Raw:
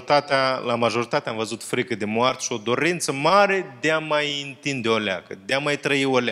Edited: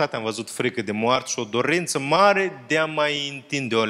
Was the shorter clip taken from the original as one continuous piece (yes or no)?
yes